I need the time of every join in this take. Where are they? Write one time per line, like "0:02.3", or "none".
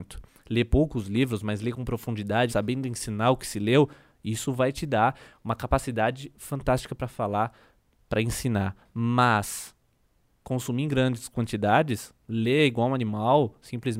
0:02.5
0:07.9